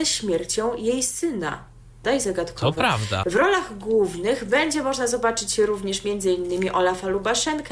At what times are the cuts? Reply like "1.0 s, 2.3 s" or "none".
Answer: 2.0 s, 3.2 s